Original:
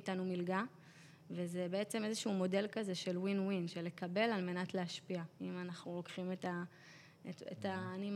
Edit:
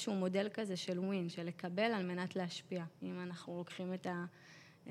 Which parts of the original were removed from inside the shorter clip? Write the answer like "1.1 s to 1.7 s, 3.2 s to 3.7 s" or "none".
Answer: 3.2 s to 3.4 s